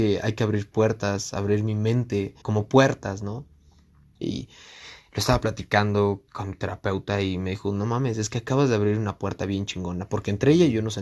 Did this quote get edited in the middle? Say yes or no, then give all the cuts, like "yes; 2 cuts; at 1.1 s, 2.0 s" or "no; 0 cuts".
yes; 3 cuts; at 2.4 s, 4.2 s, 6.3 s